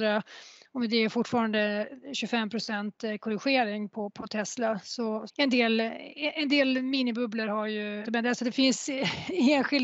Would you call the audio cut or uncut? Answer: cut